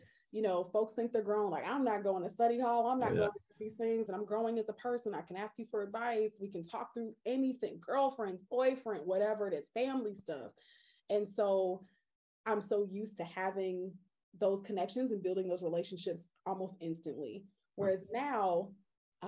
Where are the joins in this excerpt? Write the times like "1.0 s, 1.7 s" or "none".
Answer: 4.1 s